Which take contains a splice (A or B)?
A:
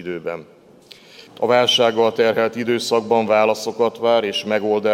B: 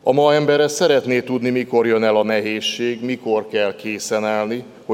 A